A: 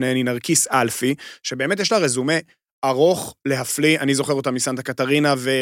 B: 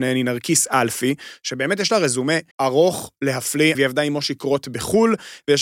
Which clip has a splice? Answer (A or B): B